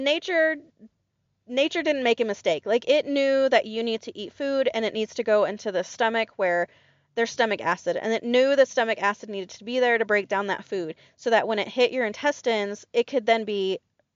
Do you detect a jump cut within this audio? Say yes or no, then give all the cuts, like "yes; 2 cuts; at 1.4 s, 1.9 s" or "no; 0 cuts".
no; 0 cuts